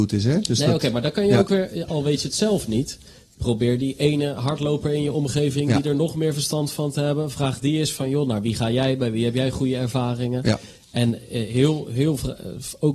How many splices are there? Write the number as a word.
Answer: one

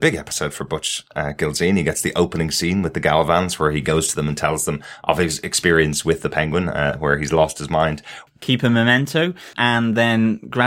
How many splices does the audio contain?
two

